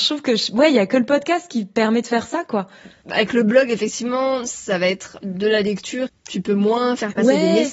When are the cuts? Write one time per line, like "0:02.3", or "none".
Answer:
0:06.1